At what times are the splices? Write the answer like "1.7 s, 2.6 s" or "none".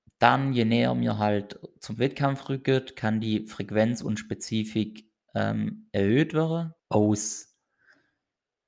6.8 s